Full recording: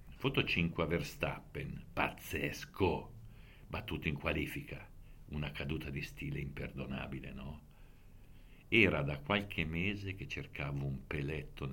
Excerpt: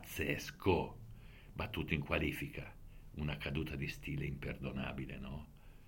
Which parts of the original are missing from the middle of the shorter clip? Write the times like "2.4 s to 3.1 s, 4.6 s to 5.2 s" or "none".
none